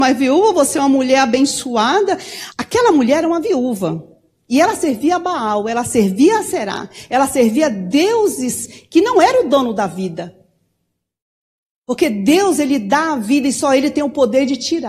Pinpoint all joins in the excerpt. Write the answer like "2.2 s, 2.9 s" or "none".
2.5 s